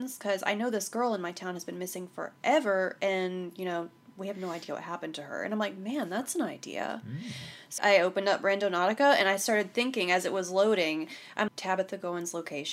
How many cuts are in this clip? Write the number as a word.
two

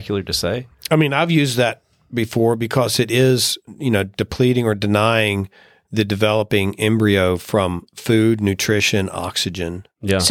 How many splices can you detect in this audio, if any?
zero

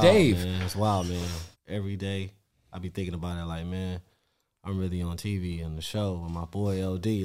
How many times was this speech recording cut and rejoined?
one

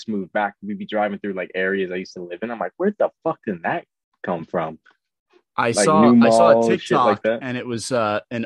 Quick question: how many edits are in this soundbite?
zero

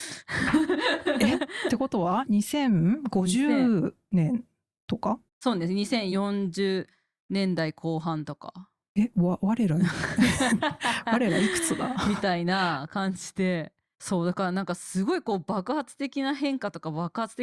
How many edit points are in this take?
one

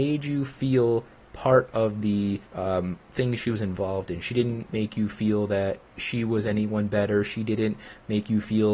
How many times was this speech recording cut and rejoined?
one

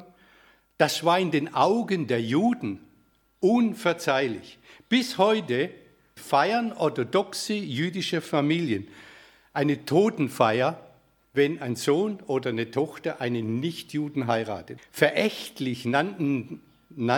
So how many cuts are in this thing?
three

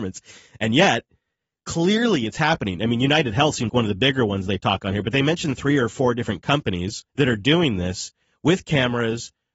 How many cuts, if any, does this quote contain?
two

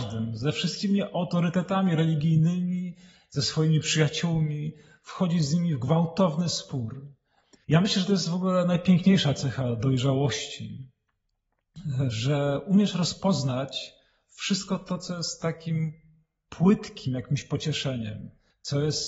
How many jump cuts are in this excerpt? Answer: one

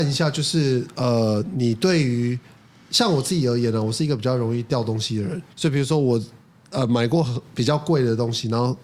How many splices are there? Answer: one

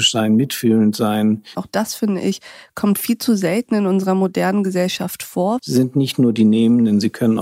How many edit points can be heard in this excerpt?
two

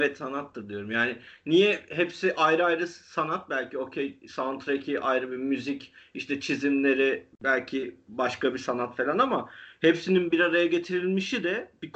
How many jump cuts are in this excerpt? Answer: one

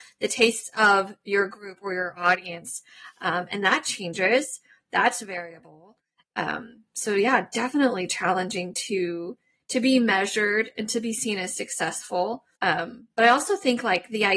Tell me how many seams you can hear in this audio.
one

